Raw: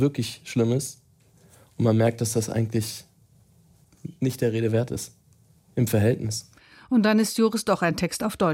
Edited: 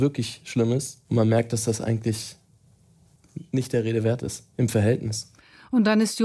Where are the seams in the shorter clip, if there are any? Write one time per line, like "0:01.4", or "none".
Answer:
0:01.0
0:04.5